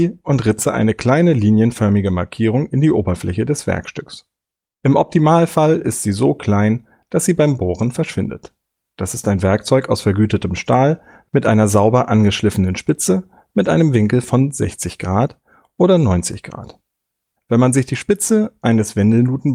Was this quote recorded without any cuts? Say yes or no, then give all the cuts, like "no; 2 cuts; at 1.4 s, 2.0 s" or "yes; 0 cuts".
no; 2 cuts; at 8.9 s, 17.4 s